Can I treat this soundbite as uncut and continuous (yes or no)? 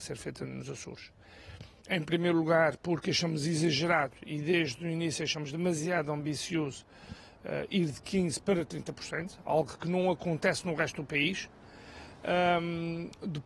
yes